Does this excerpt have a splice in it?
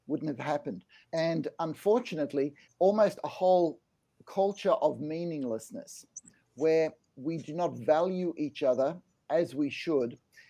yes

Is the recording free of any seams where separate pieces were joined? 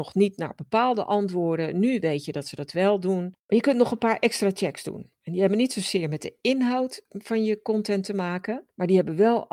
no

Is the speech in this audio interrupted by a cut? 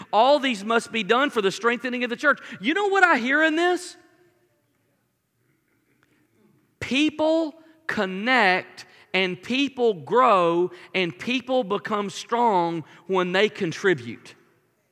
no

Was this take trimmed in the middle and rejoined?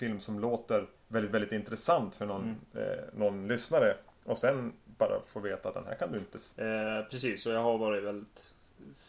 yes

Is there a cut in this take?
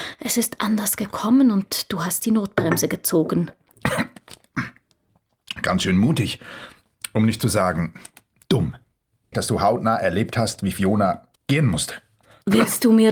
yes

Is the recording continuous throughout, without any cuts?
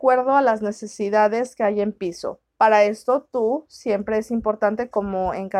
yes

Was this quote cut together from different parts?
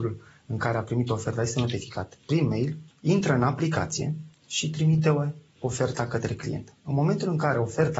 yes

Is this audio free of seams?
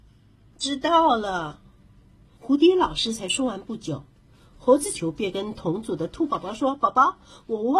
no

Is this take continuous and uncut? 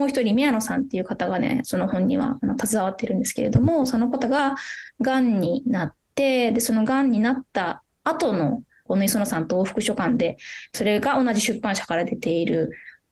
no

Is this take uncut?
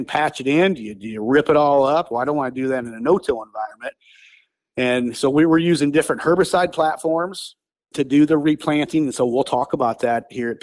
yes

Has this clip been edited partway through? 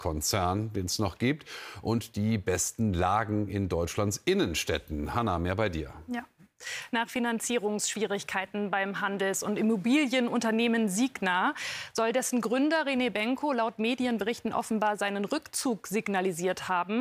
no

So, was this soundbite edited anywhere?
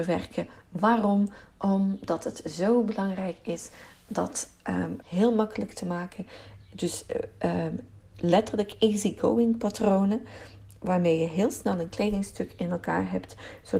yes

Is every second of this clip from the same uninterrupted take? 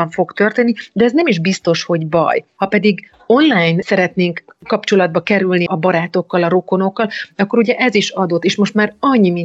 no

